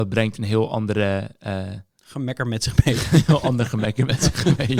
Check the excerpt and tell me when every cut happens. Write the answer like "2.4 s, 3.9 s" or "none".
none